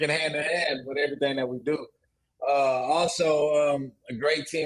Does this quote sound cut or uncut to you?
uncut